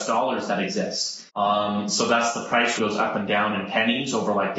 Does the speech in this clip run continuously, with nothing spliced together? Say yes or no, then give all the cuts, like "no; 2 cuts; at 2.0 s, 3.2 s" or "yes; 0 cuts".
no; 2 cuts; at 1.3 s, 2.8 s